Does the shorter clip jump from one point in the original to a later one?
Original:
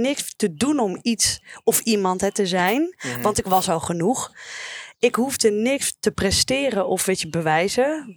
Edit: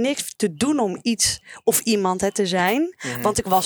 no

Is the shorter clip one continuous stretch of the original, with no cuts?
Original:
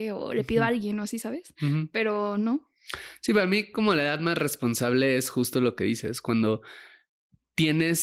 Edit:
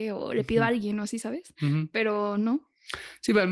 yes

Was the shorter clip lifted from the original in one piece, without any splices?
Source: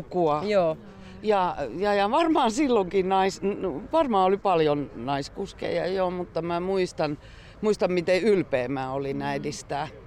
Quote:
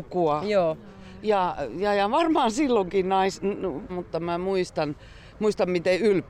no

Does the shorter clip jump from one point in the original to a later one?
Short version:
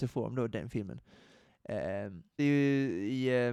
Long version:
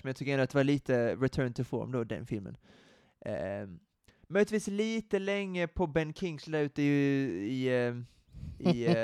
yes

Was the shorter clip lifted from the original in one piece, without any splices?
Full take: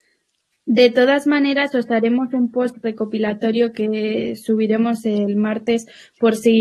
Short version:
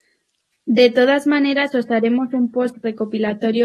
yes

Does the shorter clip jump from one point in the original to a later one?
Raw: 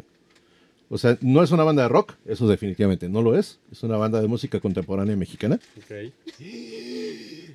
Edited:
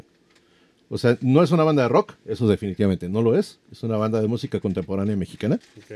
no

